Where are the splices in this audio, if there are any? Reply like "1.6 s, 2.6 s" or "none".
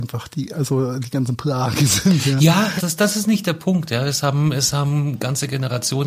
2.8 s